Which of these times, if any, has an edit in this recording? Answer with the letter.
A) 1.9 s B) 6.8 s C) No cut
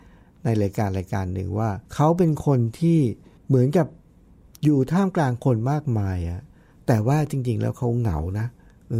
A